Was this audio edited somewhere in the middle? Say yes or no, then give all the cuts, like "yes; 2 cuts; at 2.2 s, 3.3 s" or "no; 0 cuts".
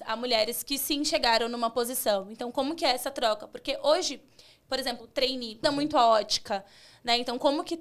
yes; 1 cut; at 5.6 s